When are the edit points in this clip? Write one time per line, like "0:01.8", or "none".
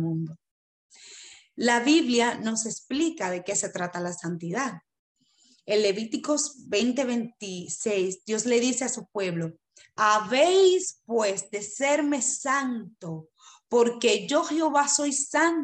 none